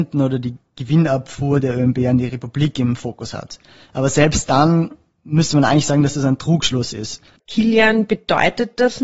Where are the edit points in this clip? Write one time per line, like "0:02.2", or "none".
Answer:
0:07.4